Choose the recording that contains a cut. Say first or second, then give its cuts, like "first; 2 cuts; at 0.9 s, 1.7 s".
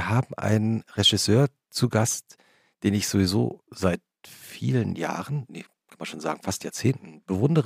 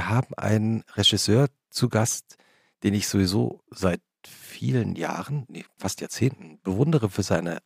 second; 1 cut; at 5.8 s